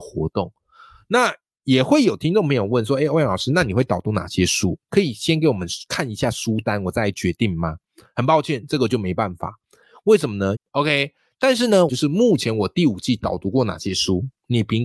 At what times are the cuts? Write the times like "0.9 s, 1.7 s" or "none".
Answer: 10.5 s, 11.9 s

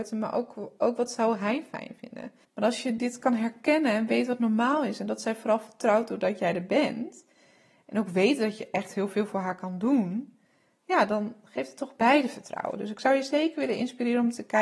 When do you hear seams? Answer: 2.4 s

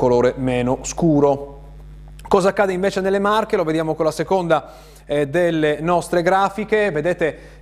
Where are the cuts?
none

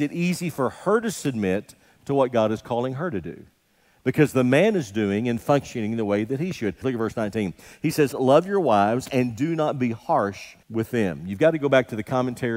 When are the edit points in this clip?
6.8 s, 8.1 s, 10.6 s

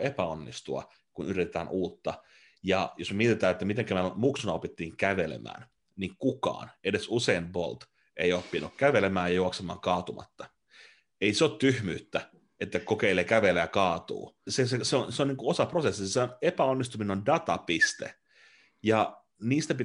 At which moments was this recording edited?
14.5 s

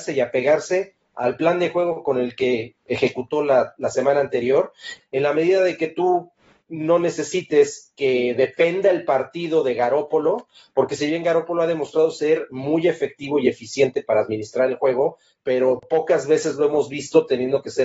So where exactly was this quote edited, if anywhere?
5.0 s

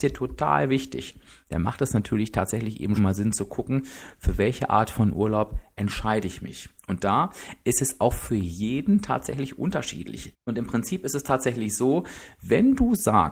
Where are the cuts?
3.0 s, 10.3 s

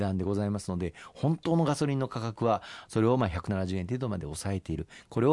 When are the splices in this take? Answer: 2.9 s

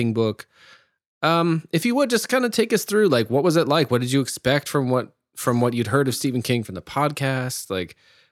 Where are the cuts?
none

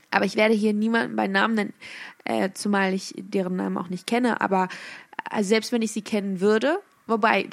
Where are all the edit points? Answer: none

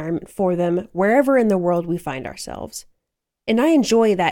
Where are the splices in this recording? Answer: 3.2 s

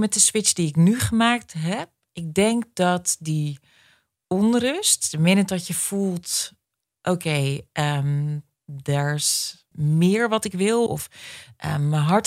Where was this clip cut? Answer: 9.7 s, 10.9 s

